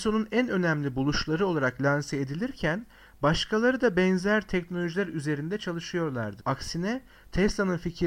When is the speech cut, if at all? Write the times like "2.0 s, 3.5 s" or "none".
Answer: 6.4 s